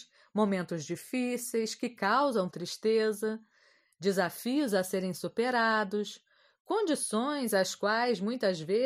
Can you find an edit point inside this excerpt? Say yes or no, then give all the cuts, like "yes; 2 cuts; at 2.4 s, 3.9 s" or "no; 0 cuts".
no; 0 cuts